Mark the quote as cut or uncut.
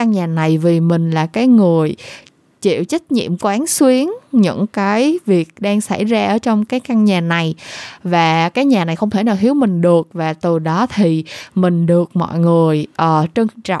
uncut